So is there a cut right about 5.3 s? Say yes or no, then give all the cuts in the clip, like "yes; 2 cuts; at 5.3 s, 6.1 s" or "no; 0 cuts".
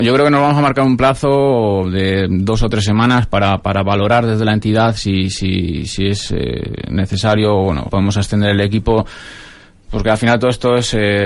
no; 1 cut; at 7.9 s